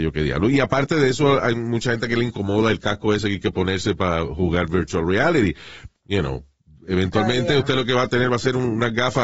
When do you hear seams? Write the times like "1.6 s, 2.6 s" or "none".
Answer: 5.9 s